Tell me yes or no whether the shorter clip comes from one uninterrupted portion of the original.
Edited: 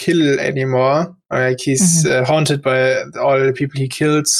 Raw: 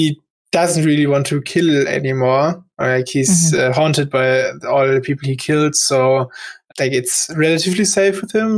yes